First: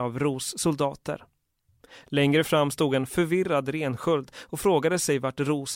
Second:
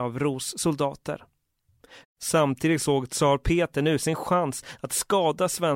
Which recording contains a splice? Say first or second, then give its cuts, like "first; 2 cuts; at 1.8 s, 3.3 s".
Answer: second; 1 cut; at 2.0 s